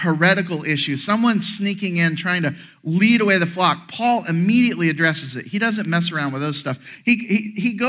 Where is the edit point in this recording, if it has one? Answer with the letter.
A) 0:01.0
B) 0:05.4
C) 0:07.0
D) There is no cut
D